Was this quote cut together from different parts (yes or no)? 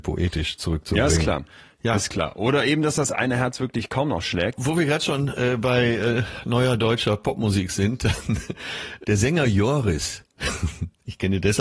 no